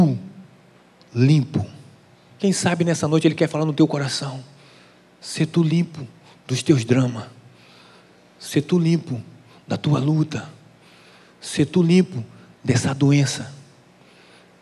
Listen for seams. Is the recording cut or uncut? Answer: cut